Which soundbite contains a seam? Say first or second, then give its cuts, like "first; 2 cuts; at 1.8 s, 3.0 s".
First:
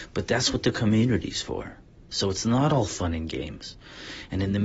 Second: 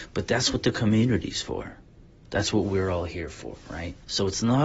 first; 1 cut; at 2.1 s